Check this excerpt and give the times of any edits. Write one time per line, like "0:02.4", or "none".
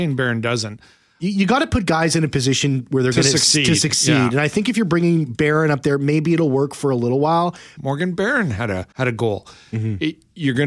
0:07.8
0:08.9